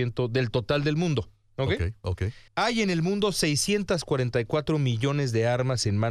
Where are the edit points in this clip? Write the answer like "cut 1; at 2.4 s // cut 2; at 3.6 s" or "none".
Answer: cut 1; at 2.5 s

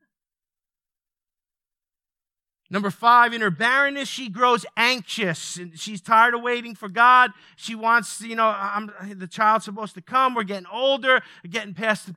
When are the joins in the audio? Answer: none

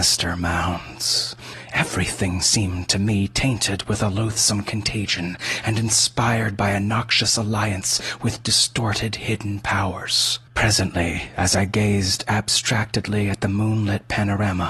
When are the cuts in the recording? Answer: cut 1; at 10.5 s

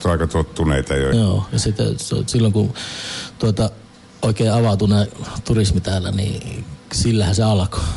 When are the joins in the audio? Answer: cut 1; at 1.1 s

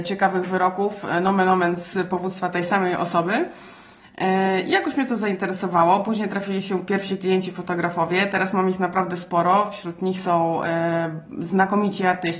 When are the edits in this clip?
none

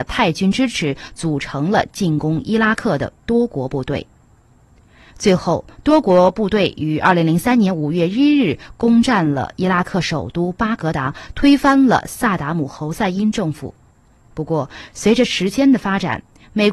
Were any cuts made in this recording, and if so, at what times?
cut 1; at 5.1 s // cut 2; at 14.2 s

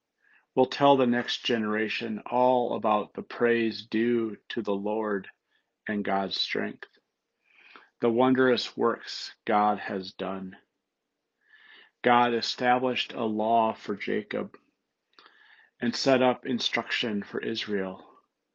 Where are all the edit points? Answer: none

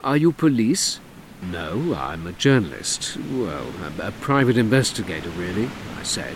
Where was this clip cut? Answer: cut 1; at 1.4 s

